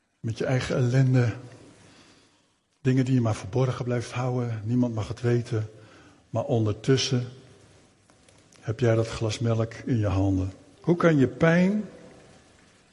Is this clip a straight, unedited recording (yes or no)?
no